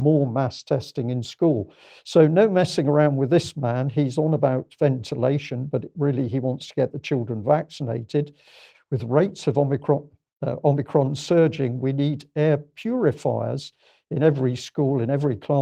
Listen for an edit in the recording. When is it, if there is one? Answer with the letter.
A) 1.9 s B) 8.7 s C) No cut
B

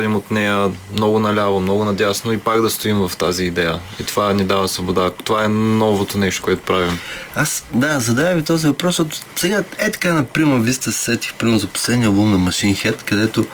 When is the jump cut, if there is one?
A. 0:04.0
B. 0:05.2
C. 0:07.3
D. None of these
D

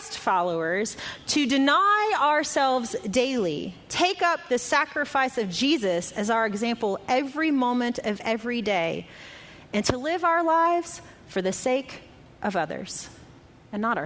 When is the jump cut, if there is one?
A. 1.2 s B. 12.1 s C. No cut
C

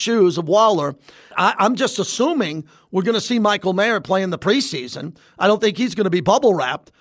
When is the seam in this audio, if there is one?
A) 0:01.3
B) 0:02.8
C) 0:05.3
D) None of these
A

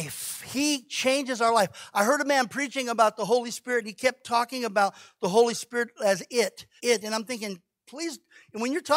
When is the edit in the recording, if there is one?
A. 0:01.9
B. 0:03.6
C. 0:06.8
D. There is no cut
C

